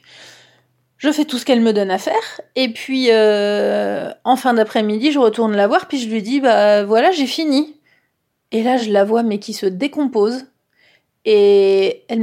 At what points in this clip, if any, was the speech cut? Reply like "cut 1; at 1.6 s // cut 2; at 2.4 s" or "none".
none